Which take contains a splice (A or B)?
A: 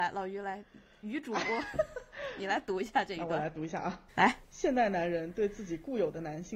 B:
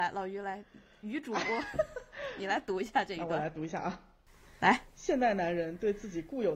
A